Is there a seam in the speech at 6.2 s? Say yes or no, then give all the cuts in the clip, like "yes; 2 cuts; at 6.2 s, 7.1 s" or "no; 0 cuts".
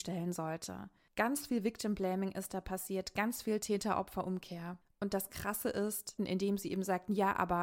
yes; 1 cut; at 6.2 s